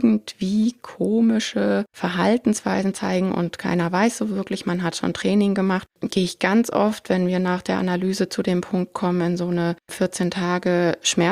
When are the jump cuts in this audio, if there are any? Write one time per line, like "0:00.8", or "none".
none